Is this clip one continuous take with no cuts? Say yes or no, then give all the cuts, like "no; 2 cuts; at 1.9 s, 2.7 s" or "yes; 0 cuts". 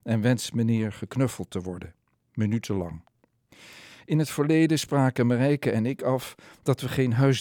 yes; 0 cuts